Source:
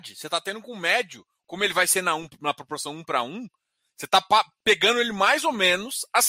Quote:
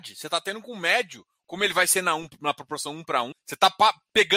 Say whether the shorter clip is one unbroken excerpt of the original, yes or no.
no